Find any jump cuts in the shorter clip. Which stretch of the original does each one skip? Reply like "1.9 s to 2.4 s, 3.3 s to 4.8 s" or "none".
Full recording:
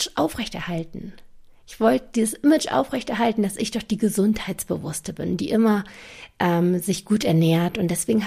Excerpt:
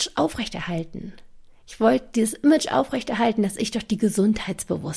none